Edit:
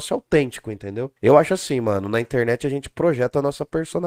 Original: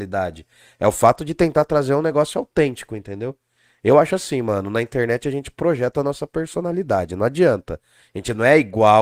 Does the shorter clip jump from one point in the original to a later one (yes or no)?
yes